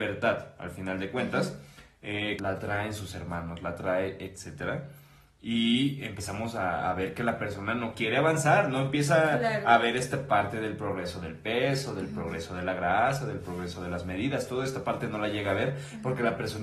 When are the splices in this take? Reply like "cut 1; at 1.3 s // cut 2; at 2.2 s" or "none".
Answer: cut 1; at 2.4 s